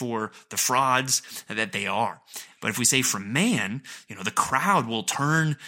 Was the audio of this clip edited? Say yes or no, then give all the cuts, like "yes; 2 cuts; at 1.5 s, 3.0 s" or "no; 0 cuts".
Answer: yes; 1 cut; at 2.5 s